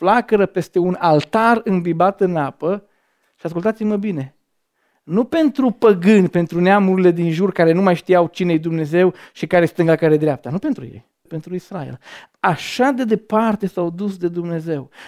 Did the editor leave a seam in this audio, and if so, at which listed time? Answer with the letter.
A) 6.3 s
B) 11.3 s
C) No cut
B